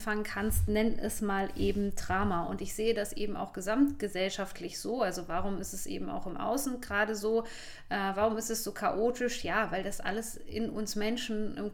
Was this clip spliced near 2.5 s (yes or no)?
no